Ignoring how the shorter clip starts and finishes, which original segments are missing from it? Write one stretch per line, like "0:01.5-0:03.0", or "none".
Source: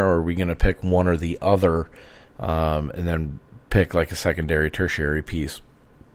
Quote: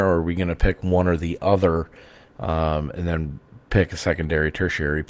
0:03.9-0:04.1